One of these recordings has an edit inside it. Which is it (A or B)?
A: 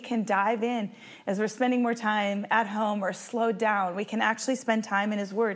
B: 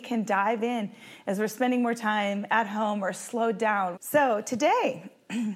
B